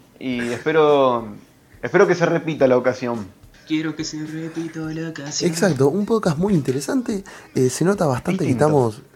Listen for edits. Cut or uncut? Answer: uncut